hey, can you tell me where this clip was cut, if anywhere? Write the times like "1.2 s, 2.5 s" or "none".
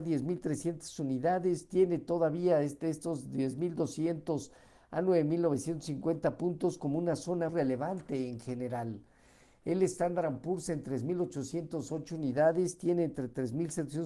7.5 s